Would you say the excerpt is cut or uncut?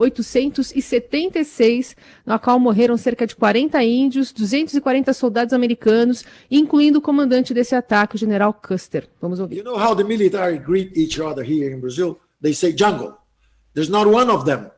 uncut